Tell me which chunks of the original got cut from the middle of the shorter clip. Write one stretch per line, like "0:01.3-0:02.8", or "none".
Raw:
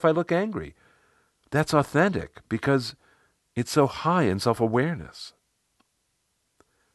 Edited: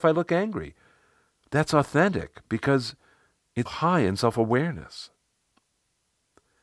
0:03.7-0:03.9